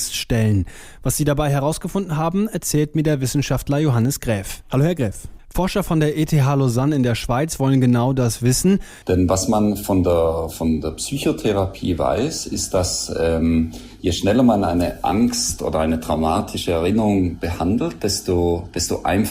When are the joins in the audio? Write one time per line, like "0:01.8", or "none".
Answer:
0:05.4
0:09.0

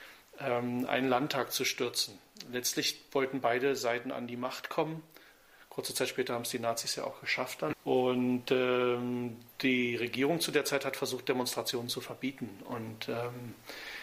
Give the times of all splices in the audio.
0:07.7

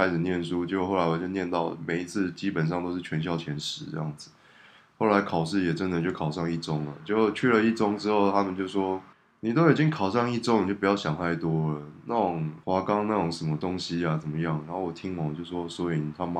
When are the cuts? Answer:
none

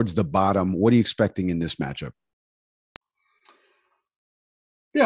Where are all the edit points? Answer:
none

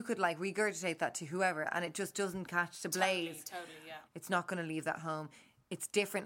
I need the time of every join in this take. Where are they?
0:04.1

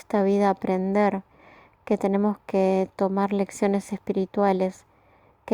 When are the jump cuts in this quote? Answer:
none

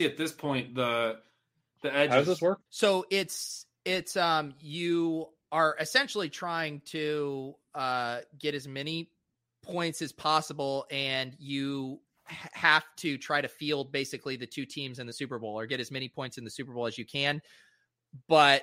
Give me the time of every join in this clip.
0:02.7

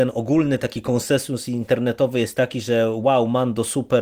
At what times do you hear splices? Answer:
none

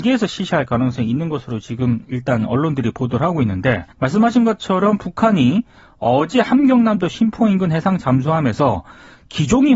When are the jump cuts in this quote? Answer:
0:03.9

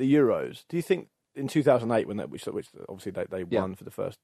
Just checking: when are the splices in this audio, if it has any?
none

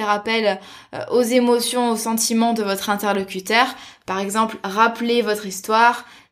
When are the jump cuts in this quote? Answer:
none

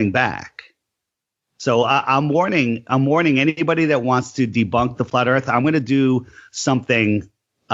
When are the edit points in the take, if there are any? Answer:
none

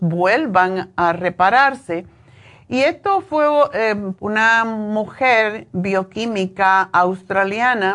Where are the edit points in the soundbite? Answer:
0:04.2

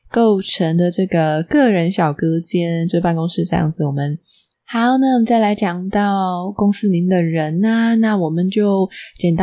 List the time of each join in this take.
0:04.5

